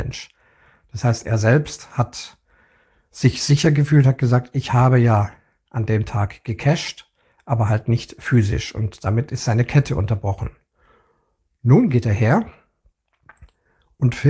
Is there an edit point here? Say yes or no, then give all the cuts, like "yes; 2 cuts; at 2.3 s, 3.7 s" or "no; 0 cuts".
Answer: no; 0 cuts